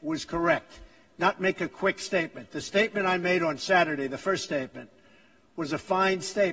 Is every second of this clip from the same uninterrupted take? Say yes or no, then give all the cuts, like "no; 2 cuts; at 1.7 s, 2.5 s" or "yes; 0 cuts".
yes; 0 cuts